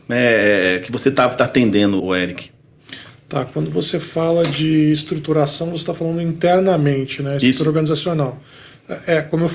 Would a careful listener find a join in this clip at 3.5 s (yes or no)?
no